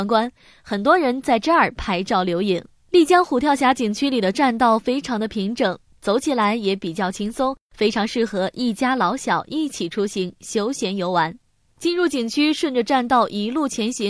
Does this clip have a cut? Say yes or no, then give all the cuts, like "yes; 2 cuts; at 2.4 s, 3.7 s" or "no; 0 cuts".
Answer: yes; 1 cut; at 11.7 s